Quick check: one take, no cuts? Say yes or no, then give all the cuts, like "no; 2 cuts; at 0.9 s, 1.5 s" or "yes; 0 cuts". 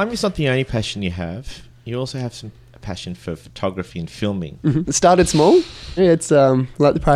no; 2 cuts; at 4.8 s, 6.0 s